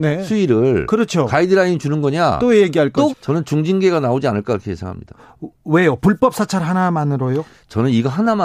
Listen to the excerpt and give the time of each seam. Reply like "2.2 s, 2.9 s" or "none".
3.1 s